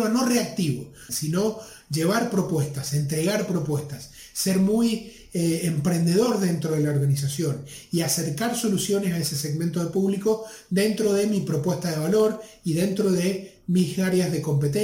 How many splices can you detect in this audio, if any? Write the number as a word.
one